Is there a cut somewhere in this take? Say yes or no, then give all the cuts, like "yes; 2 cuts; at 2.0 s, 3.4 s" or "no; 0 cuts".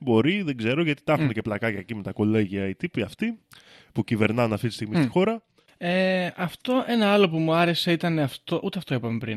no; 0 cuts